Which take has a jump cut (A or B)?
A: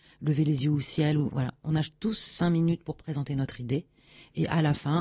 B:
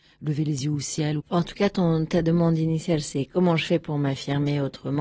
B